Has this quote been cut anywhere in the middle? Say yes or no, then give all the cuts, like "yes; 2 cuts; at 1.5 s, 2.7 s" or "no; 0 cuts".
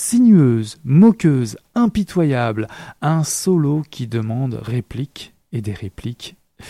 no; 0 cuts